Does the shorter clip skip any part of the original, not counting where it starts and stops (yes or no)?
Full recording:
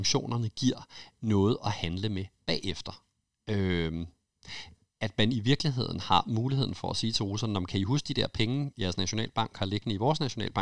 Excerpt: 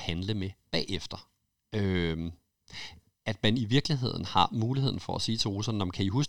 no